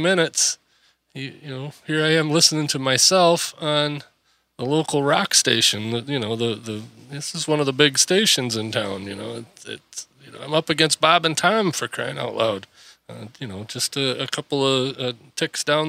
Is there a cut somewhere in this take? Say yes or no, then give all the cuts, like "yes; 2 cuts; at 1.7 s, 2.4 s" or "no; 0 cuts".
no; 0 cuts